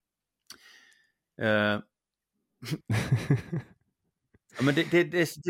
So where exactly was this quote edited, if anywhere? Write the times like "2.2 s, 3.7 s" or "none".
2.8 s